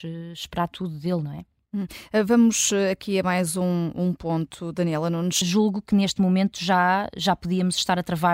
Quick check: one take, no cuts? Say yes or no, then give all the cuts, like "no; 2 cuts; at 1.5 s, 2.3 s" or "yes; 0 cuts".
no; 1 cut; at 5.4 s